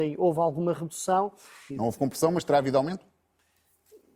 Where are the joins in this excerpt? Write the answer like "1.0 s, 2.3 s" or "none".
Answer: 1.7 s